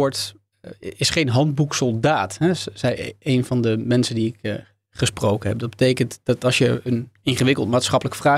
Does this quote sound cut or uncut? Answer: uncut